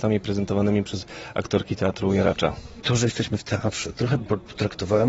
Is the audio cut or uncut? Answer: cut